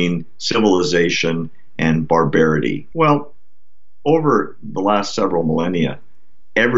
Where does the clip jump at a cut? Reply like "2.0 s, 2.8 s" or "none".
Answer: 2.9 s